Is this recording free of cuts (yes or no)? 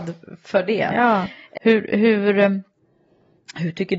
no